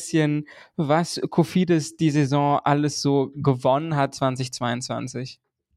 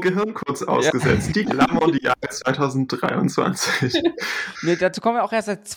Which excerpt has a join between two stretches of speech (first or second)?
second